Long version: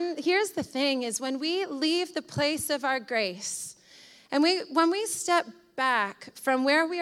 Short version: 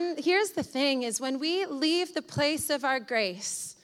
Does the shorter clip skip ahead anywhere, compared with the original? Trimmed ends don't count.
no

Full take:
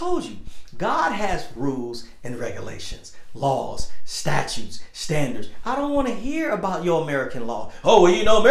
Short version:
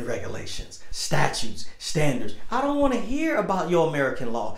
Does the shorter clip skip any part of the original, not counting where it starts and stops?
yes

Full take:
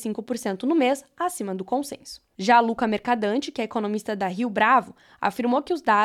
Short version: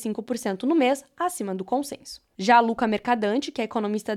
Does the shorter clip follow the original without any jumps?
yes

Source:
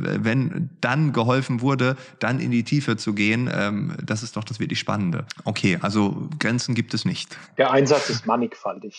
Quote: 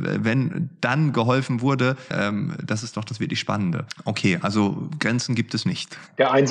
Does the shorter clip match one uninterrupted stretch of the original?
no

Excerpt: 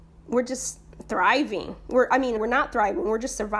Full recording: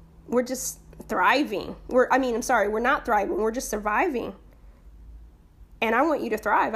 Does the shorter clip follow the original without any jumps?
no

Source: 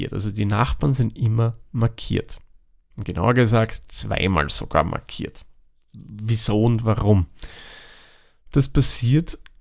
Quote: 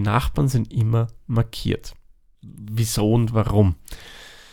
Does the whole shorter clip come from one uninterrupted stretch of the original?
no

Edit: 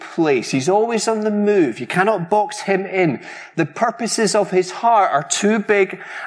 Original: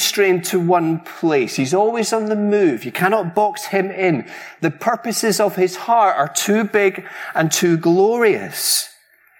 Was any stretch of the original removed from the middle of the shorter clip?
no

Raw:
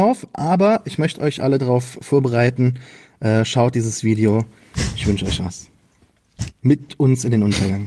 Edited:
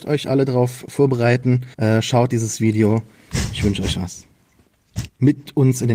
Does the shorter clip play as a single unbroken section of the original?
no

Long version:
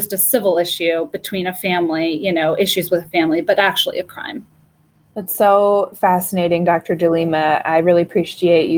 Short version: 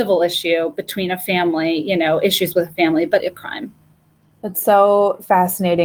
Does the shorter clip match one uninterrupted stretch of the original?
no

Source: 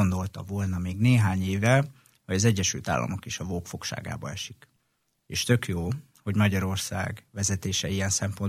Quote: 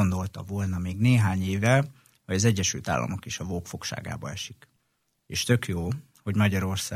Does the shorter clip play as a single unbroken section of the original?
yes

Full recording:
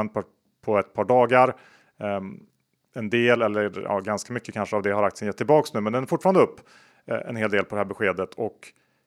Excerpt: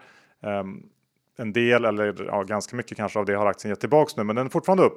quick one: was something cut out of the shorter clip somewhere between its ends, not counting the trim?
no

